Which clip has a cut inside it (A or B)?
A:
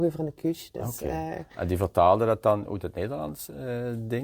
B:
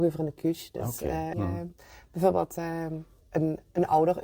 B